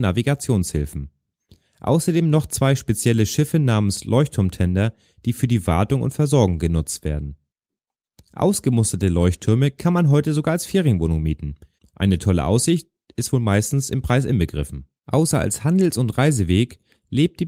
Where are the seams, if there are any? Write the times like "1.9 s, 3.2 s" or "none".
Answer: 11.8 s, 15.0 s